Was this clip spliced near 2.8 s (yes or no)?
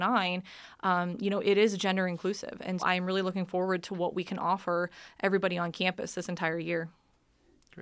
yes